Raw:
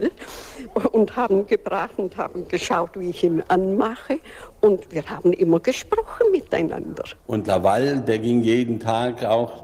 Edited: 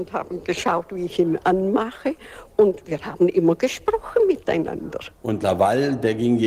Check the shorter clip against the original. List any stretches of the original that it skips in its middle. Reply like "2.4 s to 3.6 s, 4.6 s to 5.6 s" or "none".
none